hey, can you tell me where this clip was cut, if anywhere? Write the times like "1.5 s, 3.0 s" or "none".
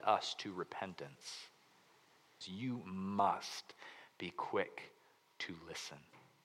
2.4 s